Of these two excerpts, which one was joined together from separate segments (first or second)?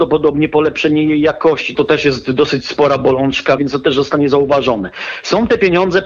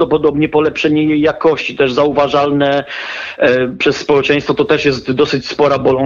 first